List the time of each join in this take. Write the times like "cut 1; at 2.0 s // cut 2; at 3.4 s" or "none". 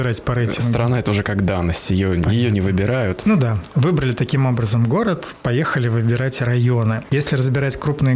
cut 1; at 3.2 s // cut 2; at 7.1 s

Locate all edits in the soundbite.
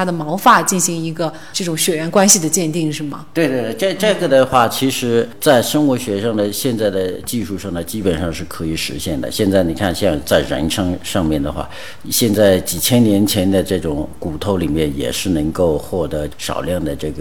cut 1; at 12.0 s

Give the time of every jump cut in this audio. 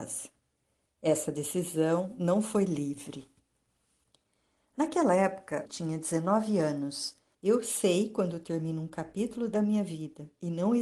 cut 1; at 5.6 s // cut 2; at 7.3 s

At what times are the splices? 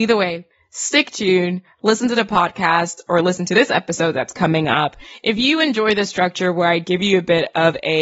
none

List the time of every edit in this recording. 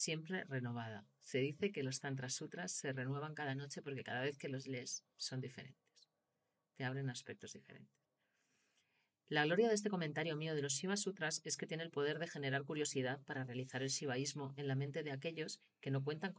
none

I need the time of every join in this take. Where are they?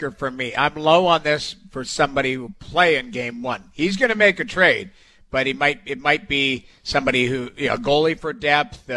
none

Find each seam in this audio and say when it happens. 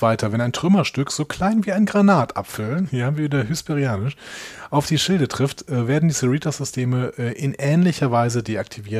cut 1; at 2.8 s

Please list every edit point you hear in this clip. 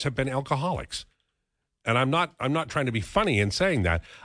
none

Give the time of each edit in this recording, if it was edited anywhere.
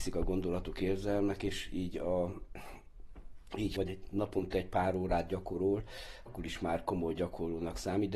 cut 1; at 3.8 s // cut 2; at 6.3 s

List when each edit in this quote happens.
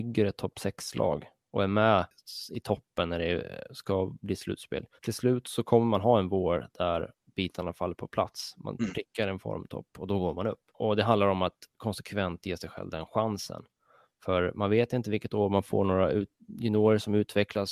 cut 1; at 5.0 s

